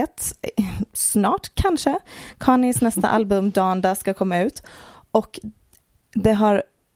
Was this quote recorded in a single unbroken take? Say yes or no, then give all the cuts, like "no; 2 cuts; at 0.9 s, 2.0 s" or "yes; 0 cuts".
yes; 0 cuts